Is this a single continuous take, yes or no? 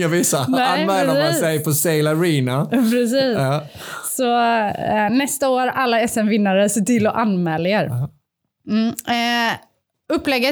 yes